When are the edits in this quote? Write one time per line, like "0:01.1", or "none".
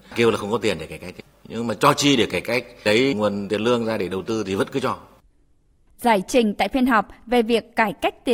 none